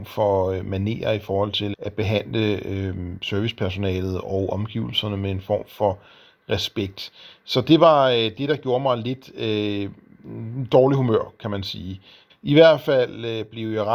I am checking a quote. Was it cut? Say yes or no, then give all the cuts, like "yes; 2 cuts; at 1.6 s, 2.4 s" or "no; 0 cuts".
yes; 2 cuts; at 1.7 s, 12.3 s